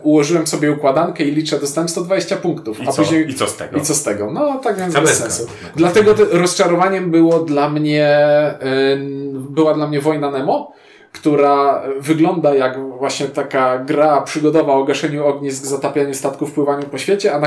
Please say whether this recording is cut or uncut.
uncut